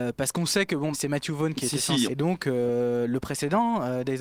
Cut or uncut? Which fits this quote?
cut